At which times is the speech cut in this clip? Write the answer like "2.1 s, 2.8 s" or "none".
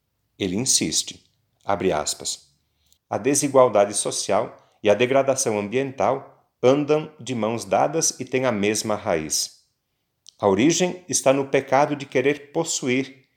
3.0 s